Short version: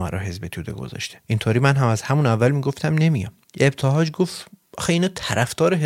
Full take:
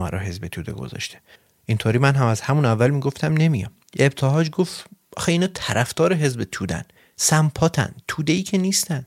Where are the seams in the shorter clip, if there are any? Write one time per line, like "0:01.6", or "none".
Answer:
0:01.2